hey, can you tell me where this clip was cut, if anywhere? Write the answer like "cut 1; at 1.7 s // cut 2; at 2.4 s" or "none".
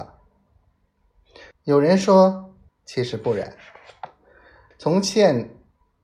cut 1; at 1.5 s // cut 2; at 2.7 s // cut 3; at 4.7 s

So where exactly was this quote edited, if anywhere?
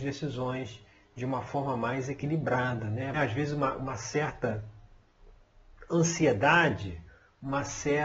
cut 1; at 3.1 s

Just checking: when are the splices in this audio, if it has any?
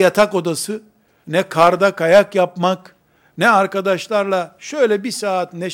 cut 1; at 1.2 s

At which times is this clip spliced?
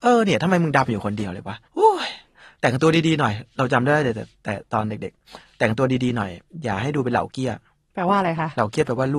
cut 1; at 1.6 s

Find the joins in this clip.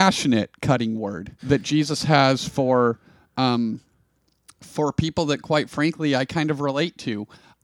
cut 1; at 1.4 s

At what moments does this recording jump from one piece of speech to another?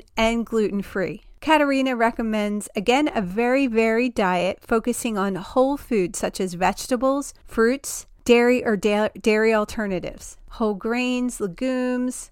none

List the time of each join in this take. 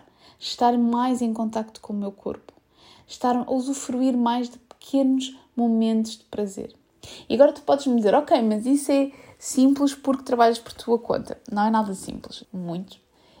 cut 1; at 12.4 s

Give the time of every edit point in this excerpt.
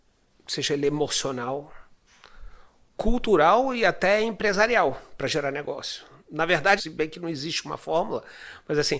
cut 1; at 6.8 s

